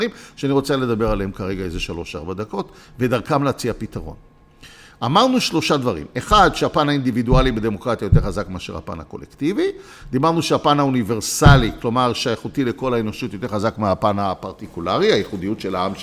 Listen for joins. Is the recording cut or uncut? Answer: uncut